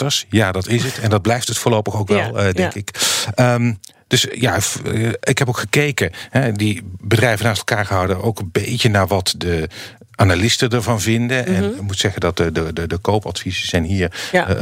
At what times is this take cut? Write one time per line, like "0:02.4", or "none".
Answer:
none

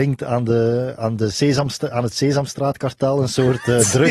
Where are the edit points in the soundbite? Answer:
none

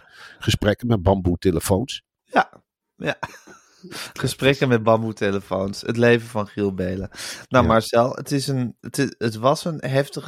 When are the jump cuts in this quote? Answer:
0:09.2

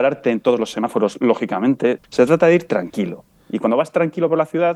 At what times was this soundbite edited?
0:02.0

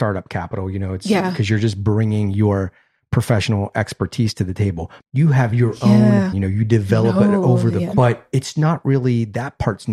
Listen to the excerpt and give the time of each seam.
0:05.0
0:06.3
0:07.9

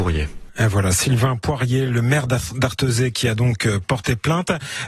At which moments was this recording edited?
none

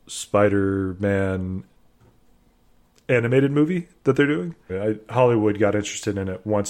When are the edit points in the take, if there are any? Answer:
0:04.7

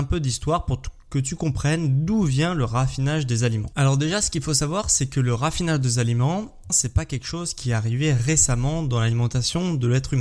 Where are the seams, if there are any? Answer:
0:06.7

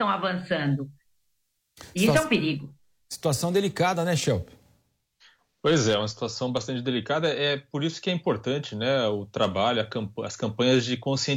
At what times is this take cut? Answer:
none

